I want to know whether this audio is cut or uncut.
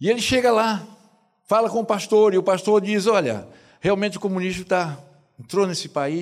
uncut